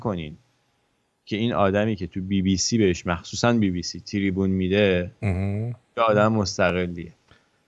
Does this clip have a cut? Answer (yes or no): no